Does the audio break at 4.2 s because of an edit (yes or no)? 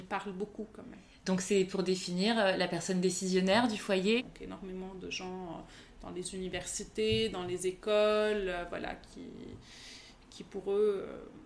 yes